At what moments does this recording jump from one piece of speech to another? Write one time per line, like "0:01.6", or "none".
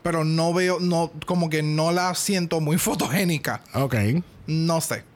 none